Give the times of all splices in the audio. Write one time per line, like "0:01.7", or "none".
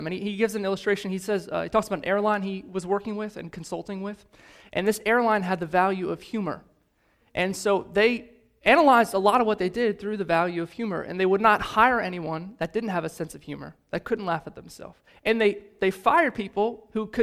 none